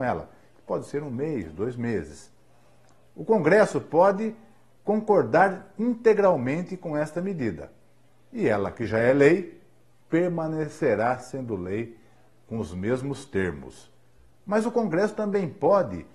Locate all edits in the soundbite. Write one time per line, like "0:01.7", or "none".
none